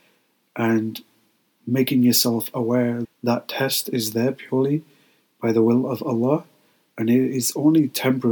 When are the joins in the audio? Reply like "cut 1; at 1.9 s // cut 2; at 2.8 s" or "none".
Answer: cut 1; at 3.0 s